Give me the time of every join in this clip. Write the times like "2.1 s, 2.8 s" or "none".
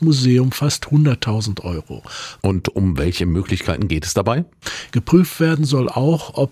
2.4 s, 4.9 s